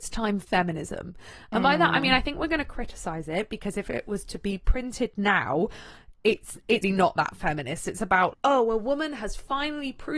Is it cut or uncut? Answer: cut